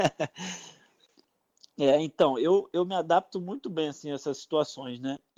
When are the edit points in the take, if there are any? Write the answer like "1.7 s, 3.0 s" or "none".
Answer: 2.7 s